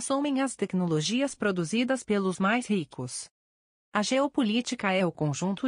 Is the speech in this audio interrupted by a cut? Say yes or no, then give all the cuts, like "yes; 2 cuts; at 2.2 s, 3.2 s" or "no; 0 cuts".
no; 0 cuts